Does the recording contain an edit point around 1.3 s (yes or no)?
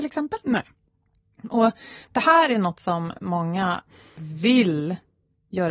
no